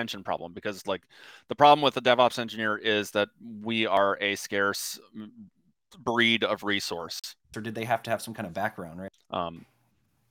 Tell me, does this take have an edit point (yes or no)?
yes